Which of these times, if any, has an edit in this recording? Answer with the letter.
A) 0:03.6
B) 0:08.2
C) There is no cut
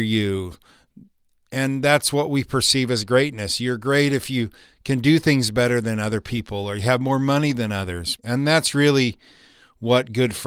B